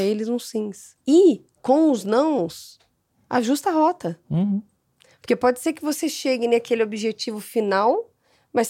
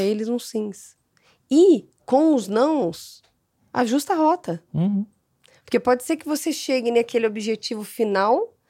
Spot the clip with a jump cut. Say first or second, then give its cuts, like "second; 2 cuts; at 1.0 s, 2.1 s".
first; 1 cut; at 1.0 s